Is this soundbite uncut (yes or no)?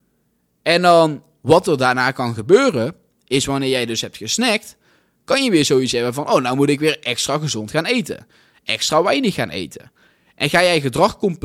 yes